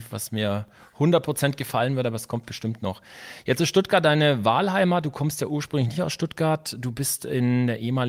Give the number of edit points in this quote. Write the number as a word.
zero